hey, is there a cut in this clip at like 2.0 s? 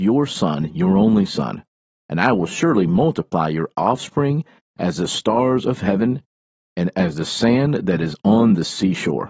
yes; 1 cut; at 2.0 s

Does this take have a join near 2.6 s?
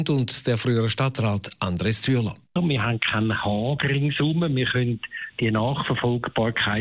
yes; 1 cut; at 2.6 s

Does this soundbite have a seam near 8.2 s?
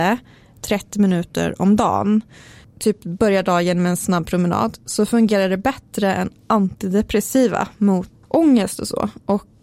yes; 1 cut; at 8.2 s

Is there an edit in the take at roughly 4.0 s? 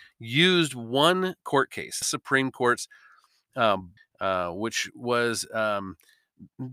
yes; 2 cuts; at 2.0 s, 4.0 s

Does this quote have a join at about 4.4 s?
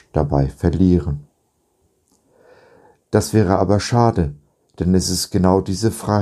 no; 0 cuts

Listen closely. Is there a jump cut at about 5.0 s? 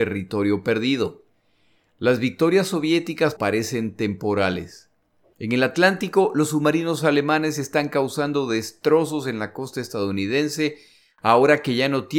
no; 1 cut; at 3.4 s

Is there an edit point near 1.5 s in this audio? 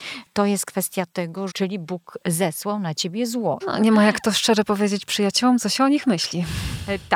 yes; 2 cuts; at 1.5 s, 3.6 s

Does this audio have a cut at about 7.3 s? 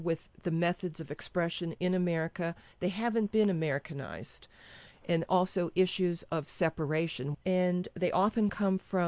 yes; 2 cuts; at 4.9 s, 7.3 s

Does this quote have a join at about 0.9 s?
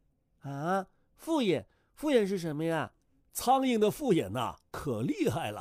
no; 1 cut; at 3.2 s

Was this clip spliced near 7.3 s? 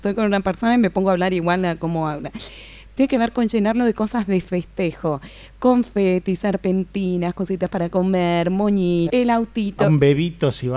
no; 2 cuts; at 2.9 s, 9.1 s

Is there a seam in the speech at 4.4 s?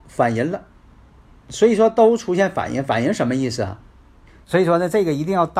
yes; 1 cut; at 4.4 s

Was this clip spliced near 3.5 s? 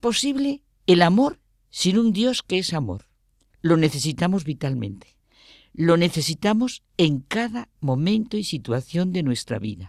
yes; 1 cut; at 3.5 s

